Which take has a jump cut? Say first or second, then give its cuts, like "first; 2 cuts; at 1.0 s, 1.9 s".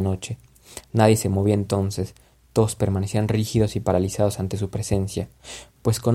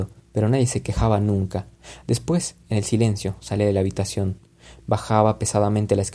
second; 1 cut; at 2.0 s